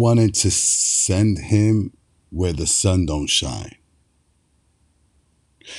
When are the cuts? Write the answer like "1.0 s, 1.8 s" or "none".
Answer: none